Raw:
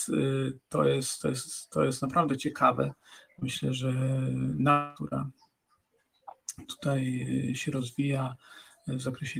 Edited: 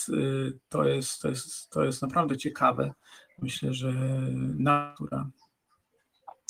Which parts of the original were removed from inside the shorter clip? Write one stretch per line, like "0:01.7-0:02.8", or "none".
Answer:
none